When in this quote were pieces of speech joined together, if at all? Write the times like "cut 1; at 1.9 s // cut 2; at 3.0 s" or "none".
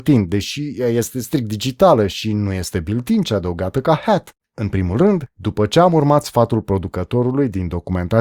cut 1; at 4.4 s